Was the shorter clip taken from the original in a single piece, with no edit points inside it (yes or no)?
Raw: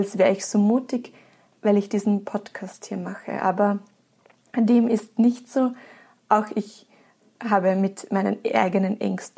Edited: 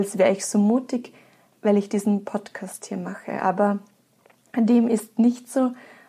yes